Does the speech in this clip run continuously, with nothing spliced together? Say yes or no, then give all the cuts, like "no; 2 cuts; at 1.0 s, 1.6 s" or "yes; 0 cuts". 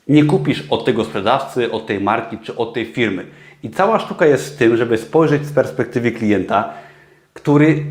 yes; 0 cuts